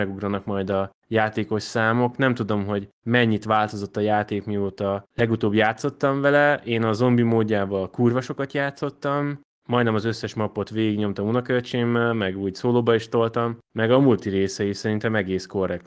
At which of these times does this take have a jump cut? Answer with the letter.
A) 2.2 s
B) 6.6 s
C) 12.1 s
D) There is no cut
D